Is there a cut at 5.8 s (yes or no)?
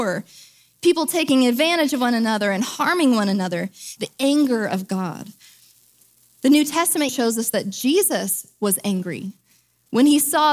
no